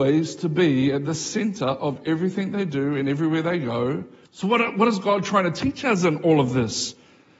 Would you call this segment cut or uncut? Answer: cut